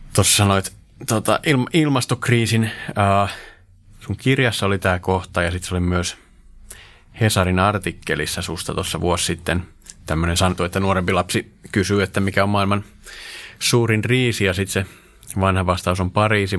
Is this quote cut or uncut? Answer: cut